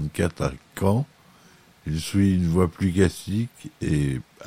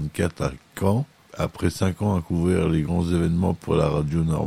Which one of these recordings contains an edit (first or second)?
second